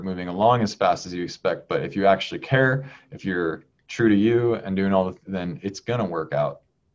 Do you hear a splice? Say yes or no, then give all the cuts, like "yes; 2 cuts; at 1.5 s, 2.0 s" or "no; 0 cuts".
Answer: yes; 1 cut; at 5.3 s